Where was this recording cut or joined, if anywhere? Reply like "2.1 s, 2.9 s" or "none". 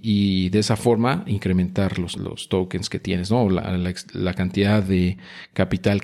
2.2 s